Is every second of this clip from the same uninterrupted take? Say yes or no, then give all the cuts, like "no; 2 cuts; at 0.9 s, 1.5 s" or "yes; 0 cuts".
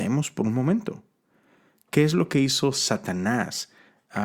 yes; 0 cuts